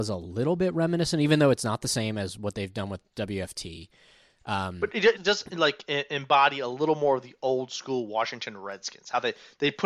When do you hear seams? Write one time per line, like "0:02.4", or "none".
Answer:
0:05.2